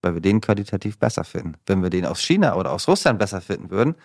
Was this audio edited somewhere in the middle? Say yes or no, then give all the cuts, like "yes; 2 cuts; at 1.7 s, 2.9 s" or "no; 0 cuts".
no; 0 cuts